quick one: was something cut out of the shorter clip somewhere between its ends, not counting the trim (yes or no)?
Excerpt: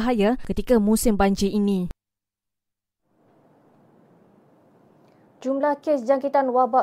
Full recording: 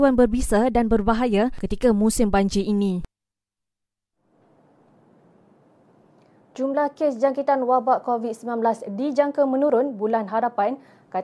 no